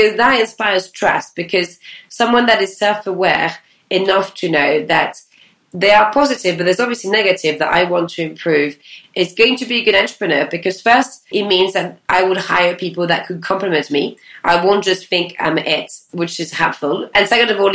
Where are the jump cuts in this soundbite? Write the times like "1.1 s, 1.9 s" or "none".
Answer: 11.3 s